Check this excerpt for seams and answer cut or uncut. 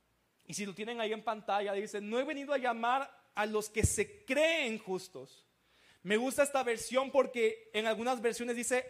uncut